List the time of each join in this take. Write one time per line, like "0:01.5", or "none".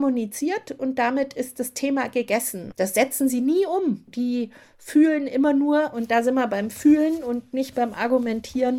0:02.7
0:04.1